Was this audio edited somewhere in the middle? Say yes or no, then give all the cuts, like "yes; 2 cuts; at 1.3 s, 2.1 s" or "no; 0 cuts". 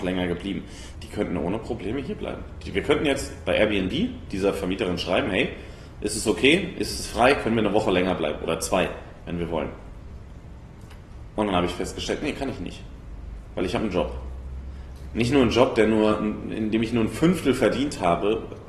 yes; 1 cut; at 0.9 s